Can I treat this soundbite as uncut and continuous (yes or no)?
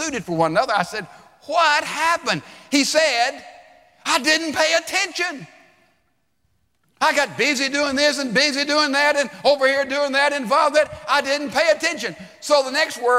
yes